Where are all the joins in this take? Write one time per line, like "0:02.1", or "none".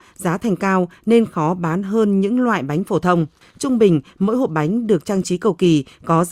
0:03.4